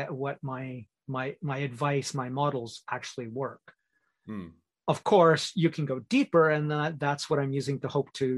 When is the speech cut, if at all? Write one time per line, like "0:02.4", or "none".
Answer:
none